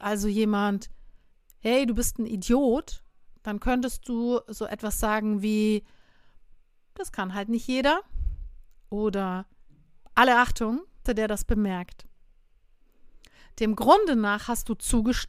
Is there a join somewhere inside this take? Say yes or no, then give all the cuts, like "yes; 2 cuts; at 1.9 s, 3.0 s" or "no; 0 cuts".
yes; 1 cut; at 11.1 s